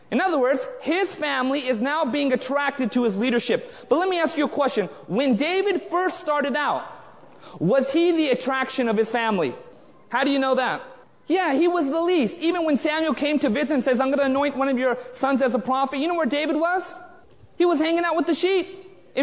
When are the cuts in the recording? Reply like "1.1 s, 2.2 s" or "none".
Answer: none